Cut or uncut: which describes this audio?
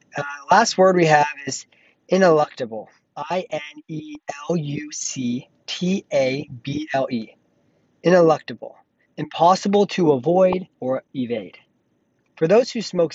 cut